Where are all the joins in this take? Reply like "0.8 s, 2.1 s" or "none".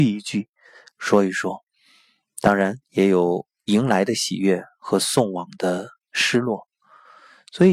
0.9 s, 2.8 s